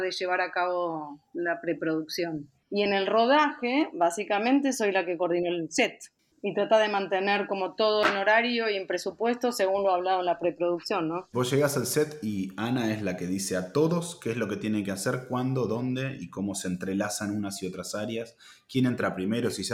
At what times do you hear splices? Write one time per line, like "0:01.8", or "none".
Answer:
0:02.6
0:11.3